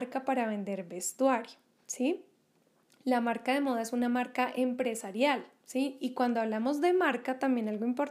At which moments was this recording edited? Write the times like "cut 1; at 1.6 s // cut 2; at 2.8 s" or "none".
none